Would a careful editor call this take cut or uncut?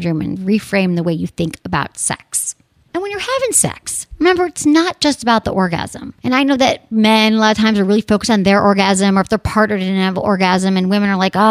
uncut